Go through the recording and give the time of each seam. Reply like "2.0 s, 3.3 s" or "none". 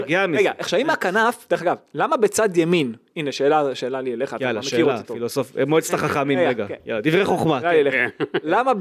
none